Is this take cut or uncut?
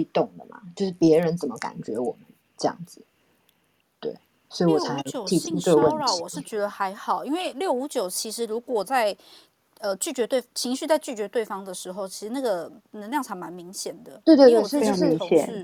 uncut